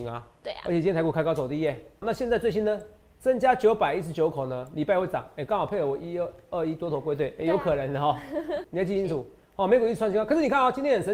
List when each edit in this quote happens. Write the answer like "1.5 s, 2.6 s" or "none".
2.0 s, 8.6 s